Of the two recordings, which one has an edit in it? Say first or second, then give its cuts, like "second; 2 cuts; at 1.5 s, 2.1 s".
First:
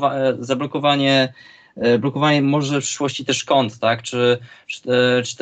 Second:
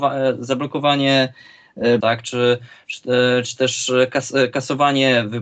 second; 1 cut; at 2.0 s